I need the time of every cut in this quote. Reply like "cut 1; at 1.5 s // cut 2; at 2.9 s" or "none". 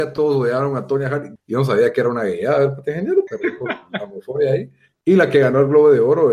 cut 1; at 1.4 s // cut 2; at 3.3 s // cut 3; at 4.9 s